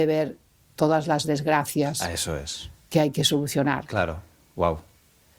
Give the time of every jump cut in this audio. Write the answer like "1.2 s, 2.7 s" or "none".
none